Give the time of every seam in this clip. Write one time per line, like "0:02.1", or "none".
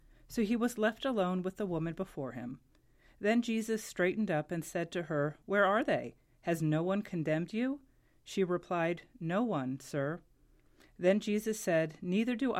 0:05.4